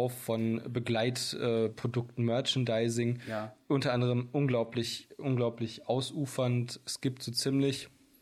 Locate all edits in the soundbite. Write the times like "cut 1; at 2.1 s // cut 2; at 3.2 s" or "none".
none